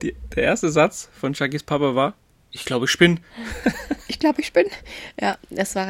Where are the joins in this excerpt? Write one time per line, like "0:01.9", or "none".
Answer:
none